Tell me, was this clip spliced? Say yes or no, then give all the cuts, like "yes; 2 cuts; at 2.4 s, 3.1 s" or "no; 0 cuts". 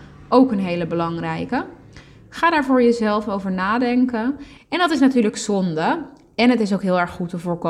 yes; 1 cut; at 4.6 s